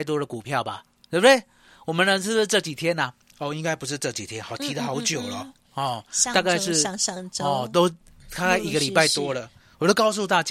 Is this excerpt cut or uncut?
uncut